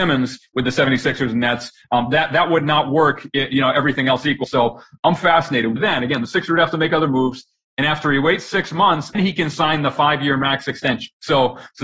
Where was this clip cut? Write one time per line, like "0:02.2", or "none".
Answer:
0:04.4
0:05.8
0:09.1